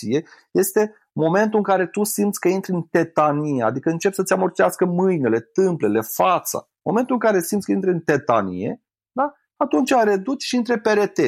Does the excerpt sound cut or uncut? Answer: uncut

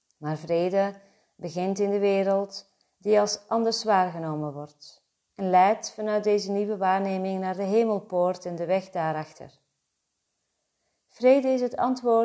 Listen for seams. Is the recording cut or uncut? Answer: uncut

